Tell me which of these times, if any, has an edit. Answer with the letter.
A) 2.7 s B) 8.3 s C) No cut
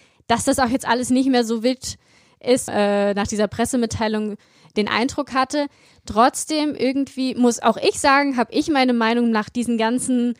A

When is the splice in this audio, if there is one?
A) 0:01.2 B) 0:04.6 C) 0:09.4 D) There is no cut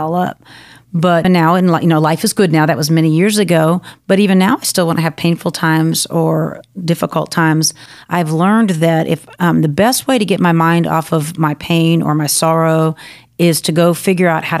A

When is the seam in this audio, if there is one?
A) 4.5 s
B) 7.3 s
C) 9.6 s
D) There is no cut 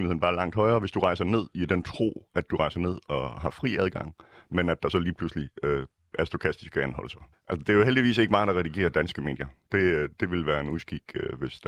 B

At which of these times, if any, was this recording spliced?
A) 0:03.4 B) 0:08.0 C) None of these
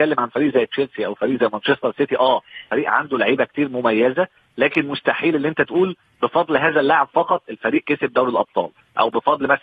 C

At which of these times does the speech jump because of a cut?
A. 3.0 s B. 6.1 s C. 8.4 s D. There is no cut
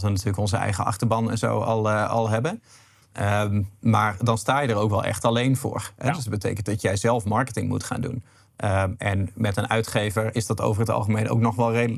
D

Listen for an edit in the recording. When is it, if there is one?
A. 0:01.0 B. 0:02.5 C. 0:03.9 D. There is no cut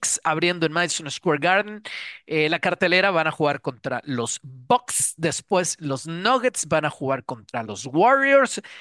D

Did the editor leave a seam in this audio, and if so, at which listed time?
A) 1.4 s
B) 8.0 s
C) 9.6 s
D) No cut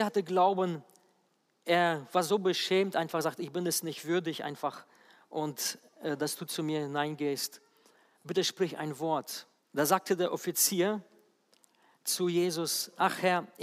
C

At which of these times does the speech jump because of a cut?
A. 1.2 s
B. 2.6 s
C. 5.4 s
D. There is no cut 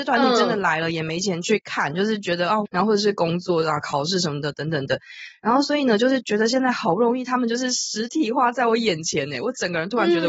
B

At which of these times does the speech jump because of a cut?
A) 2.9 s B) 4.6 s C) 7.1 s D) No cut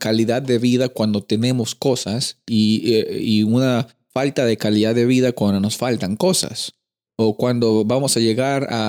C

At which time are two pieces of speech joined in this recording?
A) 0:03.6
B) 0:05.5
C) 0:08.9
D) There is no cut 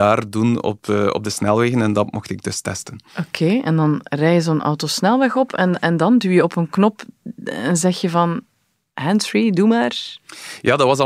D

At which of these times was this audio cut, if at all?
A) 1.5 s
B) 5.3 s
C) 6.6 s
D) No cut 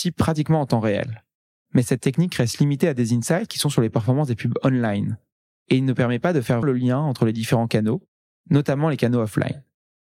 C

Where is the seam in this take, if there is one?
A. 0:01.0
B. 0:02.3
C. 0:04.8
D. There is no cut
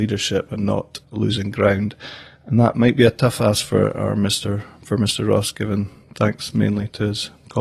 A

